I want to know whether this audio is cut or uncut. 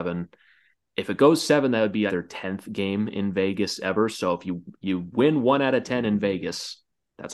cut